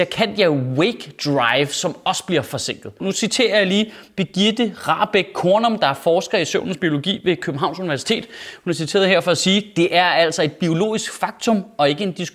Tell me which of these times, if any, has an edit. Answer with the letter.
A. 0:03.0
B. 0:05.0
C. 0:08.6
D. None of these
A